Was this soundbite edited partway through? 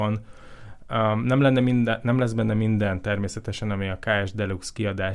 no; 0 cuts

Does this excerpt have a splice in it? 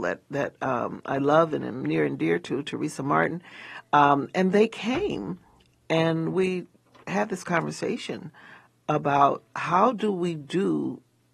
no; 0 cuts

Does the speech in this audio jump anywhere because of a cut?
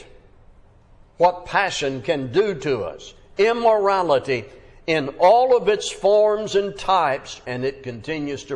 yes; 1 cut; at 7.4 s

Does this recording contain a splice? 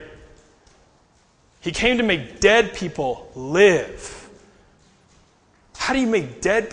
no; 0 cuts

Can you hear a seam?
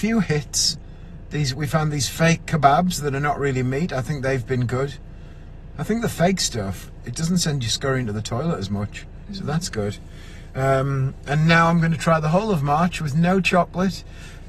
yes; 1 cut; at 7.0 s

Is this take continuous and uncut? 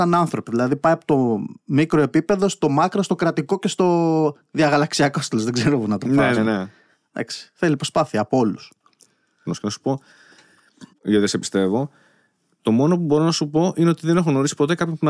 no; 3 cuts; at 6.4 s, 9.5 s, 10.9 s

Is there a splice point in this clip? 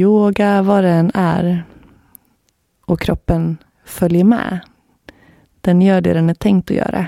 no; 0 cuts

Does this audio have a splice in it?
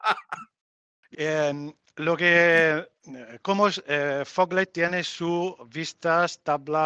yes; 1 cut; at 1.1 s

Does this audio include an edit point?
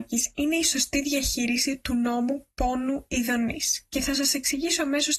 no; 0 cuts

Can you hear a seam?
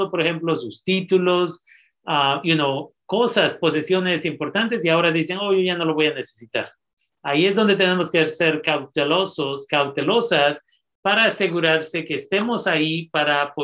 no; 0 cuts

